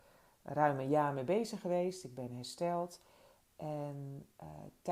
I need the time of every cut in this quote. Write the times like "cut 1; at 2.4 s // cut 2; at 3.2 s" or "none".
none

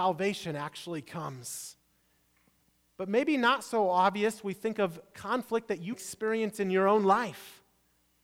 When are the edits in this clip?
cut 1; at 2.9 s // cut 2; at 5.9 s

